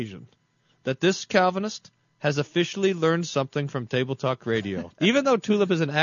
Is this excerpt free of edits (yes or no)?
no